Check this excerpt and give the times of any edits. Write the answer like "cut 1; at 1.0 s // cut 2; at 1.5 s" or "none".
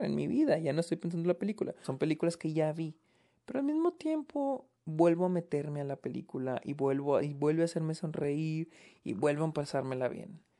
cut 1; at 1.8 s // cut 2; at 4.8 s